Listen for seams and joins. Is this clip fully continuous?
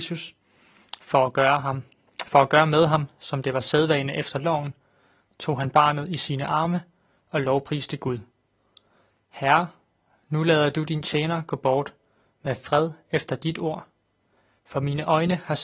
yes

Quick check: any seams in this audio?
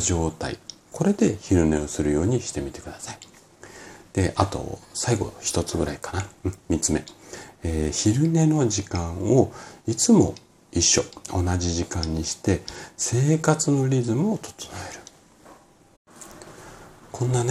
no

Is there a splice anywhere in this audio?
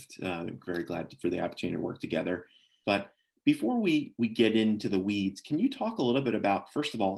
yes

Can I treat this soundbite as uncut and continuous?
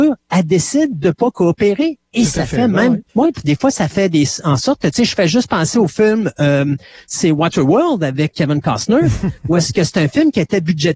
no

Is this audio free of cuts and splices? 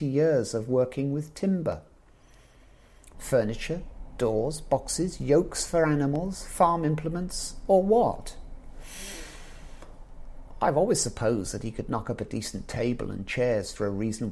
no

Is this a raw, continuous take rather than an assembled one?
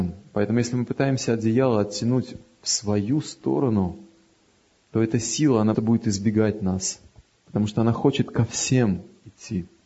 no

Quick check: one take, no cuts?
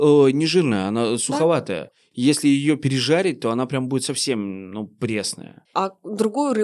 no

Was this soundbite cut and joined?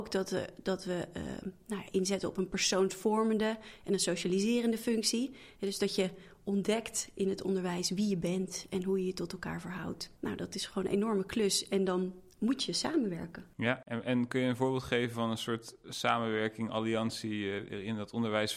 yes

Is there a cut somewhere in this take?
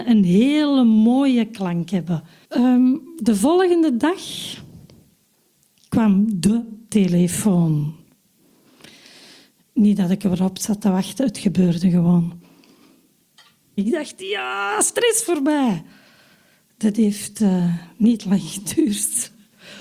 yes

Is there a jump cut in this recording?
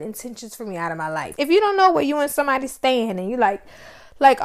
yes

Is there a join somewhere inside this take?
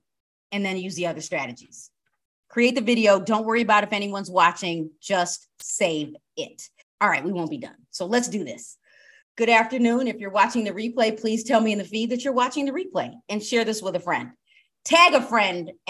yes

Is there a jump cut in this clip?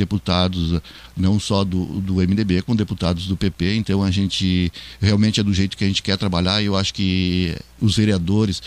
no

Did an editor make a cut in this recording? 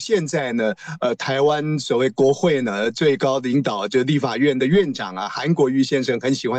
no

